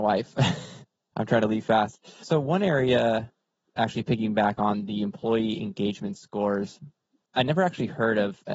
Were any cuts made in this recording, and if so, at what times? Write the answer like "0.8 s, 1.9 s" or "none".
7.3 s

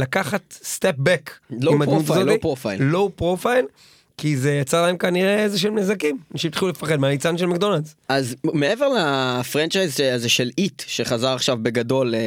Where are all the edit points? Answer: 8.1 s

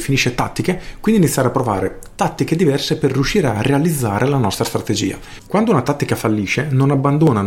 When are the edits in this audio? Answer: 5.4 s

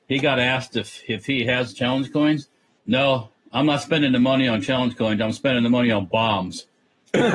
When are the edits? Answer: 2.8 s

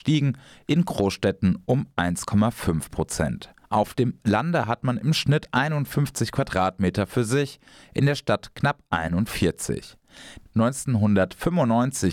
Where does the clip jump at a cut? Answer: 3.6 s, 10.5 s

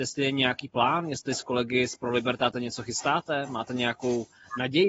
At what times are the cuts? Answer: none

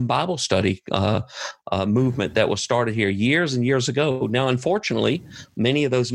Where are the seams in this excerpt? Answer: none

